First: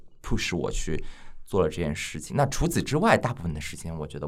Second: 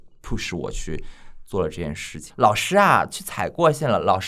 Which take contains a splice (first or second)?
second